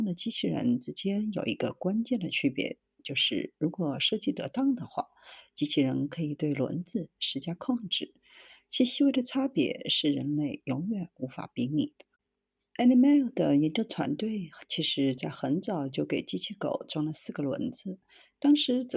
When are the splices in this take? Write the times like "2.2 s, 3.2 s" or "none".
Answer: none